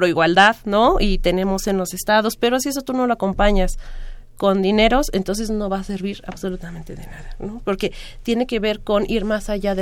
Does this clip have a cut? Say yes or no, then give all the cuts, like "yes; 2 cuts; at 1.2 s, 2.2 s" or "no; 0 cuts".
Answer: no; 0 cuts